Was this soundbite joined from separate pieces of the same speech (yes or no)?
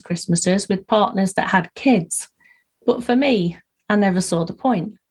no